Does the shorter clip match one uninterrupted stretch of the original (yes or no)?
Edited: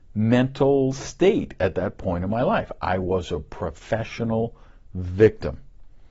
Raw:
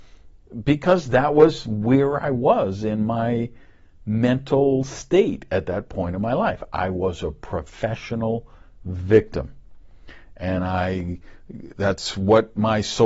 yes